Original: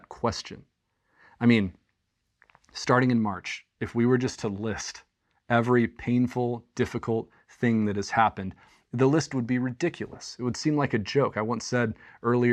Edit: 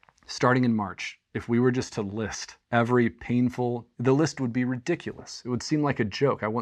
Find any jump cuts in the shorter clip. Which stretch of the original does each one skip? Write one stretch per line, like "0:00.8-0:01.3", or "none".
0:05.1-0:05.4
0:06.7-0:08.9